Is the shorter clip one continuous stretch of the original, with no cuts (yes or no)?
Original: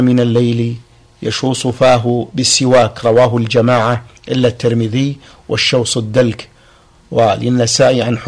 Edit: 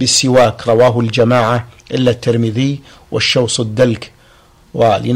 yes